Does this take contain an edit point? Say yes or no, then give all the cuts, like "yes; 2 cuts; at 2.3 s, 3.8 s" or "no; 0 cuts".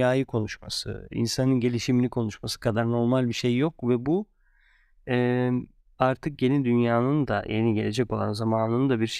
yes; 1 cut; at 1.1 s